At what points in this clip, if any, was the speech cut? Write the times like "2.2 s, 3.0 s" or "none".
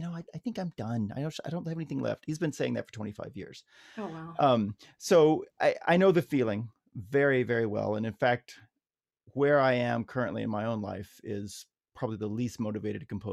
none